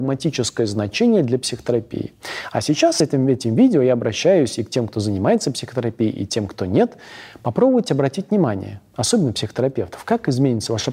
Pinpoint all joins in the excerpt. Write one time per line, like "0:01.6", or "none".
none